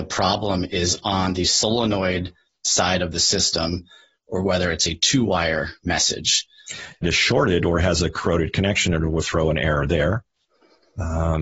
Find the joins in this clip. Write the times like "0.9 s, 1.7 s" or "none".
7.0 s, 9.2 s